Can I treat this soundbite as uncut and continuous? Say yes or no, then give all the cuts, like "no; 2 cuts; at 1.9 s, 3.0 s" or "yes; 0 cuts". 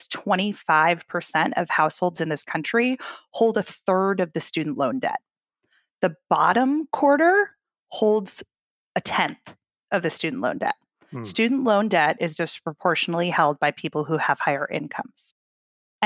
yes; 0 cuts